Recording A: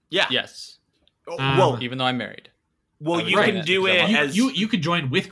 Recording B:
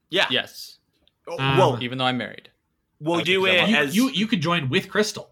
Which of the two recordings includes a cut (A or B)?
B